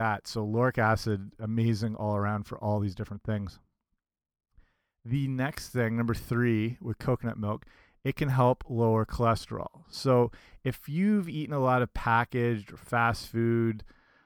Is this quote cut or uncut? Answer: uncut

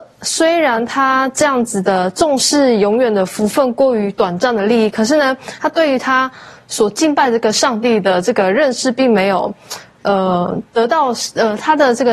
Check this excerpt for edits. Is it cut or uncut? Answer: uncut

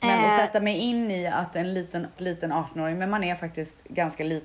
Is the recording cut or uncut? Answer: cut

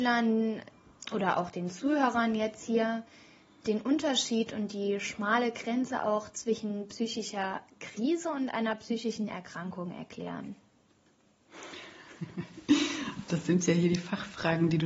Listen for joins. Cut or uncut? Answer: uncut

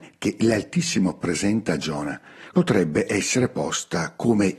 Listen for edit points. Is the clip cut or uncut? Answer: cut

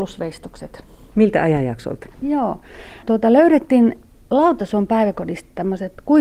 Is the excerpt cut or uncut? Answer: cut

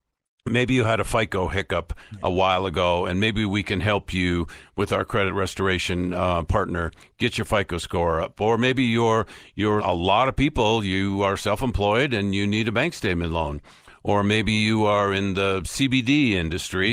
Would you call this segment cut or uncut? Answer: cut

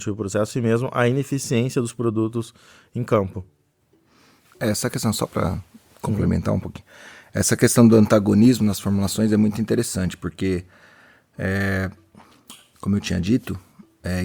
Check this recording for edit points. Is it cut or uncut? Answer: uncut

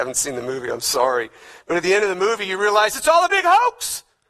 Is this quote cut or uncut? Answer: uncut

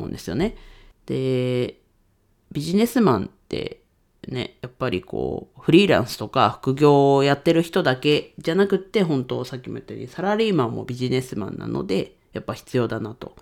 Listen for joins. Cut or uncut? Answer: cut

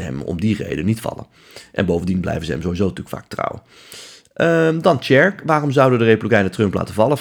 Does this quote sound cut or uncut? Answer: uncut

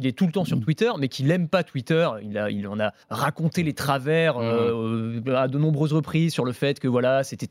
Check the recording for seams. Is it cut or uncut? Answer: cut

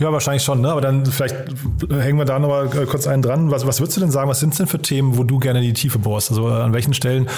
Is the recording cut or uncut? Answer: uncut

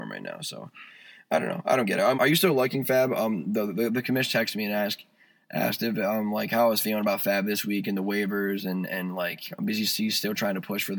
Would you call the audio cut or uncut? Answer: cut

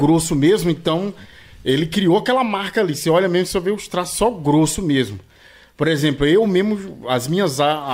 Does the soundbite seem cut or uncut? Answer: uncut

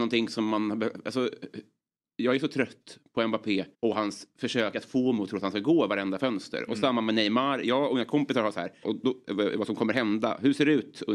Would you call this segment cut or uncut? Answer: cut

